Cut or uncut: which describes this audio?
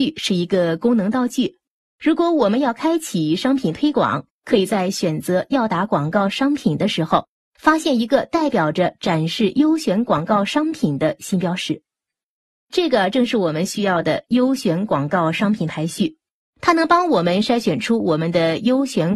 uncut